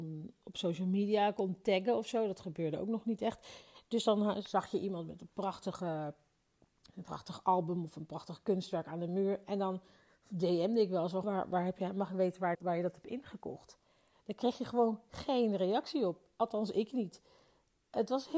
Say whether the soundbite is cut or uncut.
cut